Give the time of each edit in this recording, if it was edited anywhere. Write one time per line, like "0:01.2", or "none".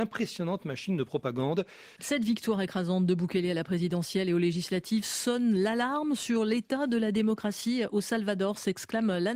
0:02.0